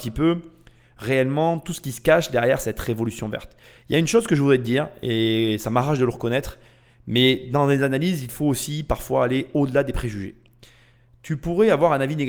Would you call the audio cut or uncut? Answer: uncut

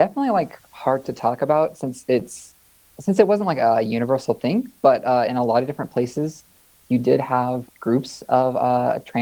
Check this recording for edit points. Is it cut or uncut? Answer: uncut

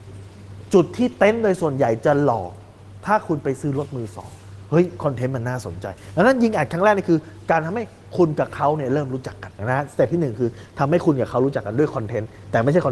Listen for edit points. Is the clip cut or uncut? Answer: cut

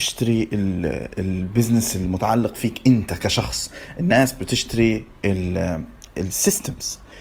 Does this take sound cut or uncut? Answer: uncut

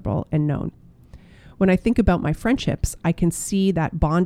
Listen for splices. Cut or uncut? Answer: uncut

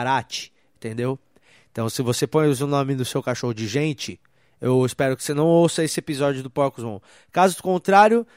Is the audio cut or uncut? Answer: uncut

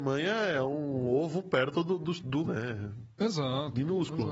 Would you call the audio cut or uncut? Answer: cut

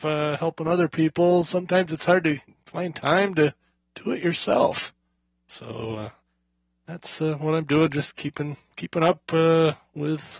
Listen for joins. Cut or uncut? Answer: uncut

